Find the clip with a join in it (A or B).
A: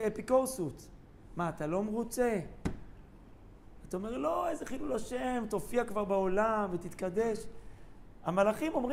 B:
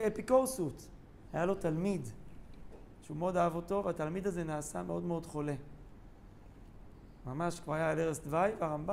B